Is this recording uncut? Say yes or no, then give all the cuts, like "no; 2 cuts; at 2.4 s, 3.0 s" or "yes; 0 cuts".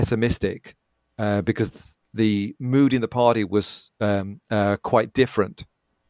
yes; 0 cuts